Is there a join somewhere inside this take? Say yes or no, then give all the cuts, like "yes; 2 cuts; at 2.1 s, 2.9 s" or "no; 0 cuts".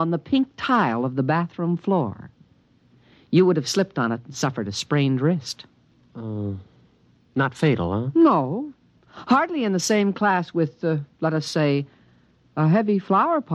no; 0 cuts